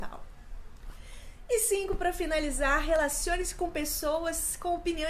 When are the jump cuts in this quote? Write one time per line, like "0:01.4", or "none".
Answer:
none